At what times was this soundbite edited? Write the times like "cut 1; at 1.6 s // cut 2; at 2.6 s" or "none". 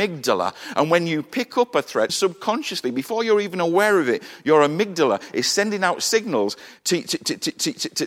cut 1; at 2.1 s